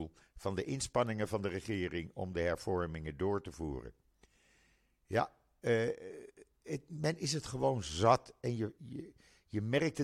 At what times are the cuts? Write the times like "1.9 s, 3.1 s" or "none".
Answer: 8.8 s